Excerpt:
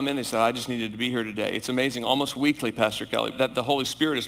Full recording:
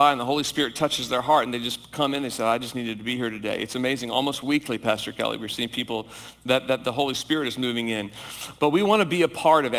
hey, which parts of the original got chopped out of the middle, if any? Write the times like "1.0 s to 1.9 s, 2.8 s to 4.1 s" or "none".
5.4 s to 6.6 s